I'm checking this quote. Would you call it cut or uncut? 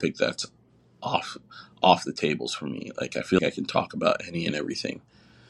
cut